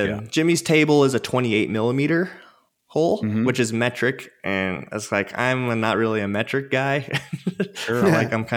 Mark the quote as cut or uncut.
uncut